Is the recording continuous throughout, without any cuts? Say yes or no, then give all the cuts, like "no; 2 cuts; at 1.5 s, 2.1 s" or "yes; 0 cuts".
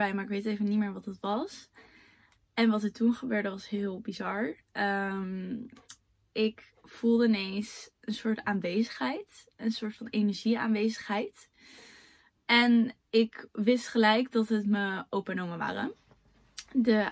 yes; 0 cuts